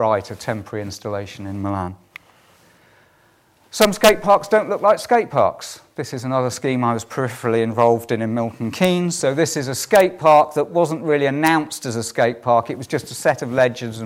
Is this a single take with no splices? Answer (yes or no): yes